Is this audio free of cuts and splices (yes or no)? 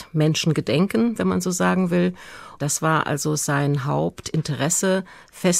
no